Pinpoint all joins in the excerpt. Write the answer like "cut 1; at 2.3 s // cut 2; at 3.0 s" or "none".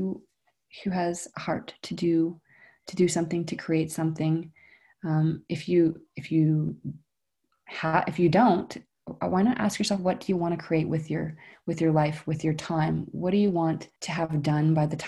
cut 1; at 14.0 s